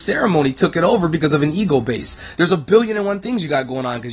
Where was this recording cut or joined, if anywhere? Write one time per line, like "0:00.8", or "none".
0:02.3